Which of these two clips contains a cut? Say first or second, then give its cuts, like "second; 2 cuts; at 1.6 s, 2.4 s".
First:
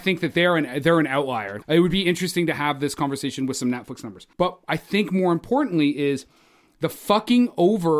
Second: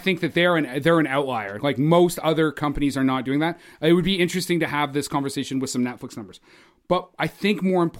first; 2 cuts; at 1.6 s, 4.3 s